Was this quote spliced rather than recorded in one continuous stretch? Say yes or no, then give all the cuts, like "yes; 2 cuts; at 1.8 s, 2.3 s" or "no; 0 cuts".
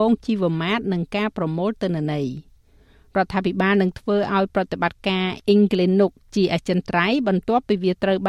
no; 0 cuts